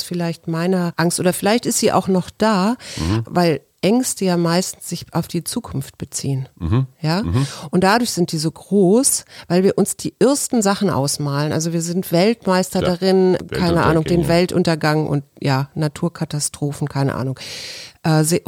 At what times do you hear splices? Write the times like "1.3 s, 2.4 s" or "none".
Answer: 3.2 s